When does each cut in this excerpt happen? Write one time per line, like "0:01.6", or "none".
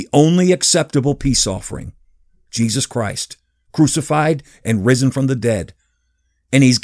none